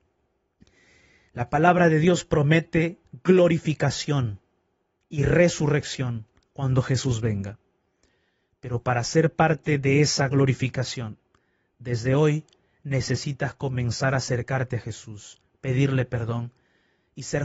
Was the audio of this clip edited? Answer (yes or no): yes